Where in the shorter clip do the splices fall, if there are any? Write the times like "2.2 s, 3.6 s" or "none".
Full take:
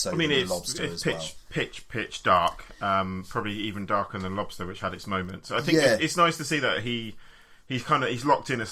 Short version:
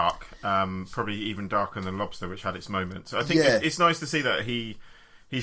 none